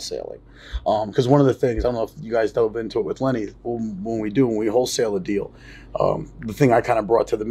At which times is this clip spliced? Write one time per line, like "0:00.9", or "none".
none